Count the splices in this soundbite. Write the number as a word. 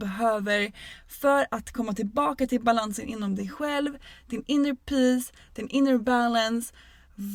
zero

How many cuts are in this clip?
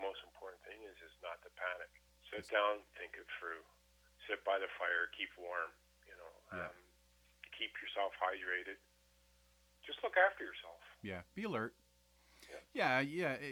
two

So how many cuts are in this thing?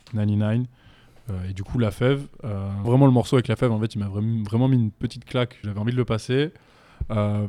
two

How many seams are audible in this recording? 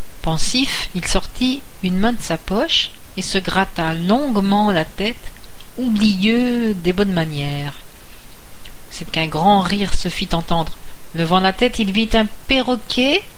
one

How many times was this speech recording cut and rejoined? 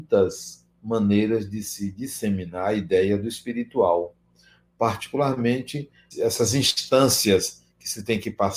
one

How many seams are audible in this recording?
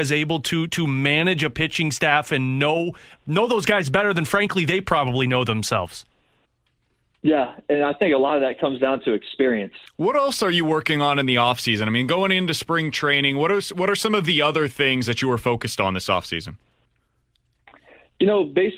one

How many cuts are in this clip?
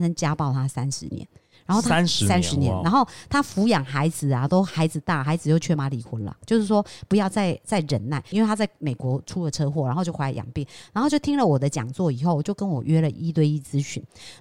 two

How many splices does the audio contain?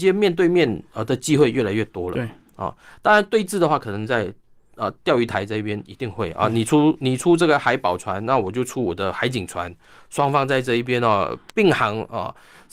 zero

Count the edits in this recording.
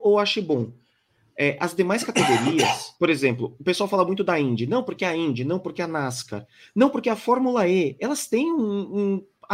zero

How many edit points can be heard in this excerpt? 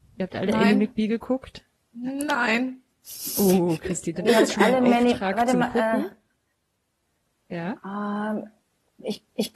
one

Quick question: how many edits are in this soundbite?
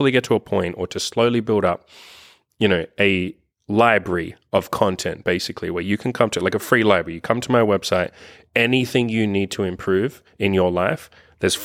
zero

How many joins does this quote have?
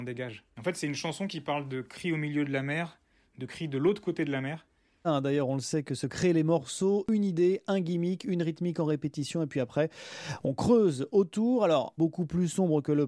two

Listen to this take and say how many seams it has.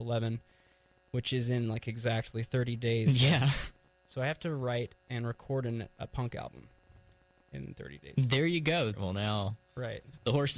one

